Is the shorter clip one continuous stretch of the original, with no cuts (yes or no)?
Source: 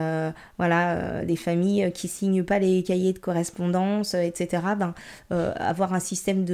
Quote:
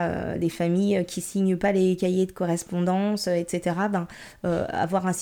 yes